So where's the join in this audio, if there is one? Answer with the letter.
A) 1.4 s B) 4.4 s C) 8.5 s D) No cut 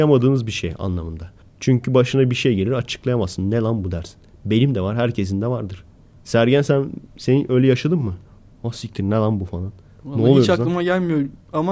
A